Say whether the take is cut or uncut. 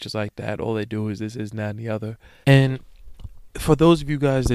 cut